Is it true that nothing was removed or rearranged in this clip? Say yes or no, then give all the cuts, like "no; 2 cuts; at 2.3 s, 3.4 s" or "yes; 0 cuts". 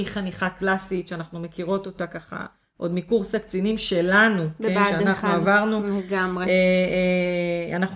yes; 0 cuts